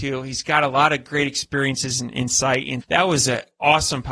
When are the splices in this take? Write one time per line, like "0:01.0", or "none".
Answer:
0:02.8